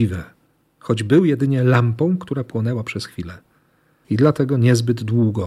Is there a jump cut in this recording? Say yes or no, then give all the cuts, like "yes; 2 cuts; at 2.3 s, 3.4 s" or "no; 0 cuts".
no; 0 cuts